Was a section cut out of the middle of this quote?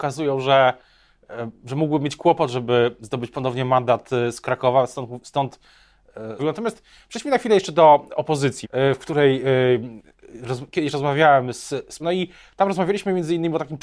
yes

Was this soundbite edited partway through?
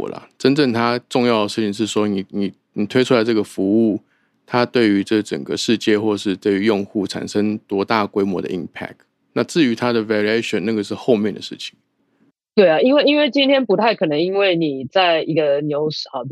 no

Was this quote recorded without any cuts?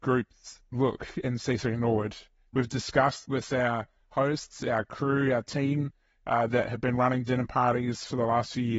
yes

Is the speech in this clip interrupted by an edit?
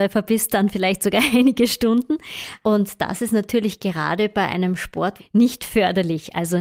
yes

